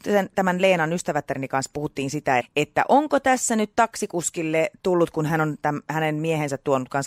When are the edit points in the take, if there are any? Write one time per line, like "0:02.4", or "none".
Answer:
0:02.4